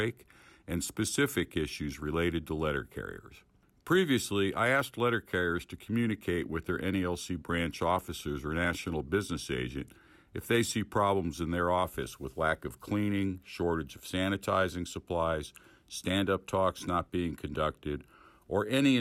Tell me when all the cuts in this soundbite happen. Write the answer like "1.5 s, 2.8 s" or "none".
none